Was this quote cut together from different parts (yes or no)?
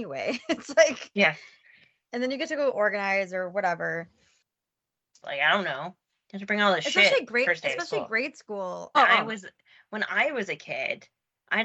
yes